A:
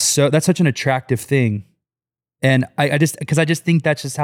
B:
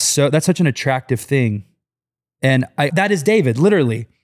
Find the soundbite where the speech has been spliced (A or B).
B